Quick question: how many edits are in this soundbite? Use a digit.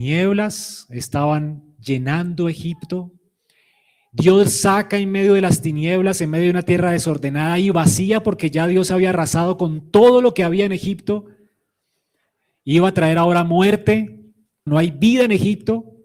1